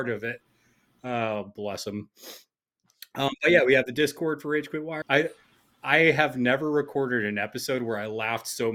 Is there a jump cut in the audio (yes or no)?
yes